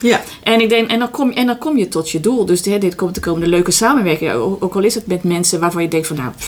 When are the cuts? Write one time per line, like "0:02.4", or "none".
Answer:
none